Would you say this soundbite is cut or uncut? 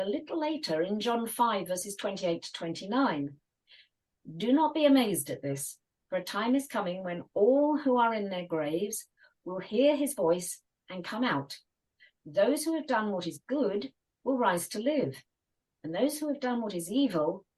uncut